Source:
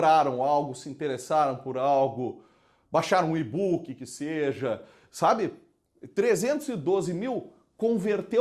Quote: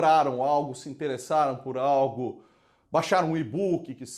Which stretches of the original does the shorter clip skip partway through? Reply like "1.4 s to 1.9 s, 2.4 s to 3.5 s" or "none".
none